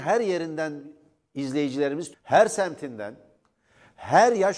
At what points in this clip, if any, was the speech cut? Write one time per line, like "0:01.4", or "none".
0:02.1